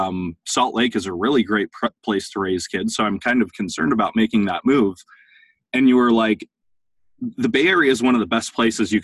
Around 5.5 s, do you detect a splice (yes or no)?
no